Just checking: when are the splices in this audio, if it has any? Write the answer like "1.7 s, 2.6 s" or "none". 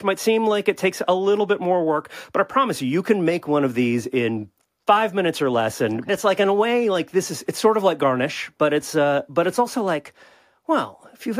6.1 s